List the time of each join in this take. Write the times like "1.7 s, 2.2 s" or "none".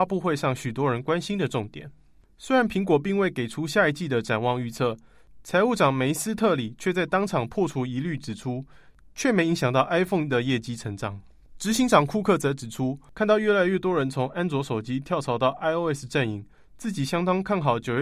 9.0 s

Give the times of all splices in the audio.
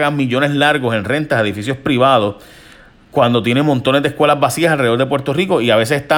none

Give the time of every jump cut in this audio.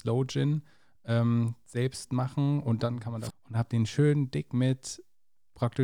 3.3 s

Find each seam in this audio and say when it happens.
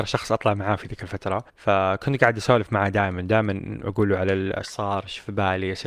1.5 s

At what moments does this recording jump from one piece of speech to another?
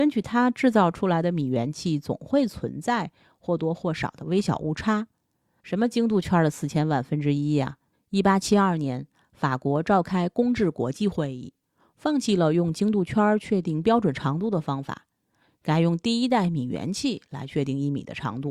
7.9 s

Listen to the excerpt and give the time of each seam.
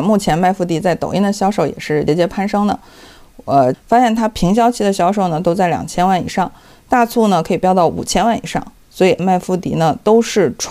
2.1 s, 3.7 s, 9.2 s

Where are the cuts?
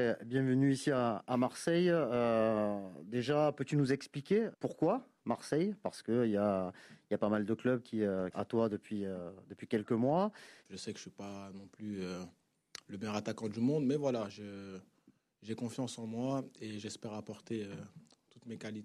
4.5 s, 8.3 s, 10.6 s

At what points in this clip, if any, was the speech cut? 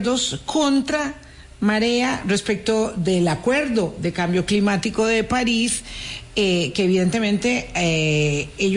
none

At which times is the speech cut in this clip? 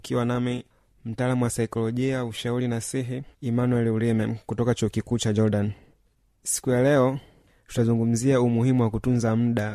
3.3 s

